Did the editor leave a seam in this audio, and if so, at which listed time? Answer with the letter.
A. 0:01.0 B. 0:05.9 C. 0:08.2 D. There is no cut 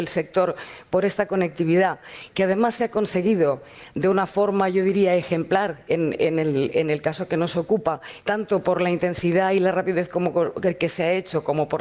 C